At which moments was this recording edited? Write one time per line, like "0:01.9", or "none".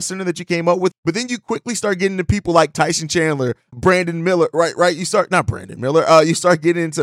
0:00.9
0:03.7